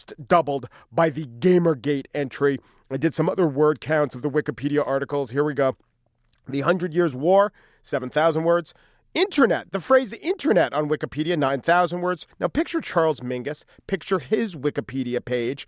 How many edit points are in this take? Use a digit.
1